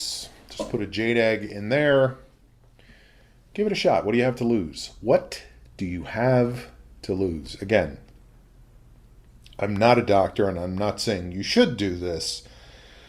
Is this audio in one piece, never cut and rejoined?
yes; 0 cuts

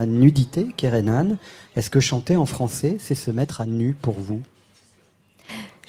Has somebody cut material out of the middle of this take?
yes; 1 cut; at 1.6 s

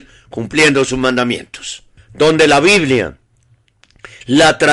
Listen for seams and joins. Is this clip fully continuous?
no; 1 cut; at 2.0 s

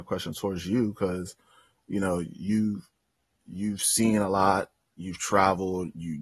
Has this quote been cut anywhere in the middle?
no; 0 cuts

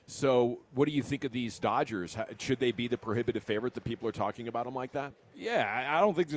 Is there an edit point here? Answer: no; 0 cuts

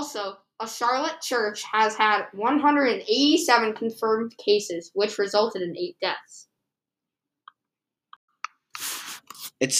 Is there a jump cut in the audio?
no; 0 cuts

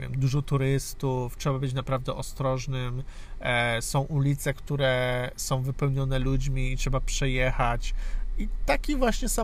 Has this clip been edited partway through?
no; 0 cuts

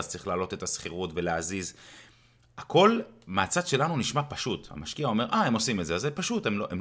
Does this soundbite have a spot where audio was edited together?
no; 0 cuts

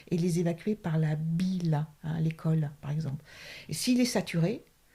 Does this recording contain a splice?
no; 0 cuts

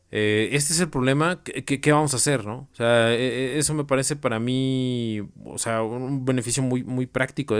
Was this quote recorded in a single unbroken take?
no; 1 cut; at 2.7 s

